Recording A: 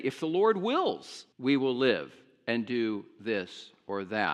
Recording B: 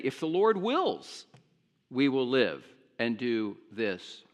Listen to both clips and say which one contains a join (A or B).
A